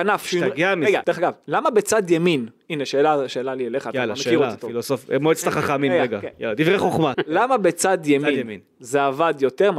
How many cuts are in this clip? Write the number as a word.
two